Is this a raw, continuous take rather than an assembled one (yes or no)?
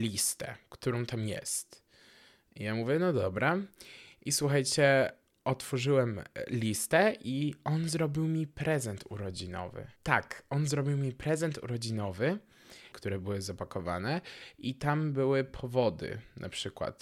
no